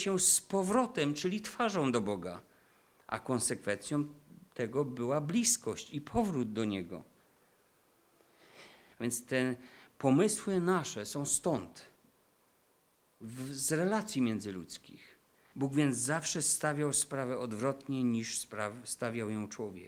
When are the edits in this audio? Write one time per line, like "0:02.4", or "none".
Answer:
0:08.9
0:15.5